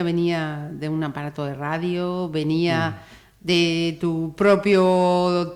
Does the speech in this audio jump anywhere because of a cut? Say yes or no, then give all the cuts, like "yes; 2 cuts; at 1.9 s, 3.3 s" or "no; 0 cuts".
no; 0 cuts